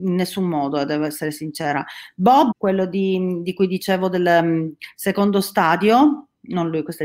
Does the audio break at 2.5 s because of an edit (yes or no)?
yes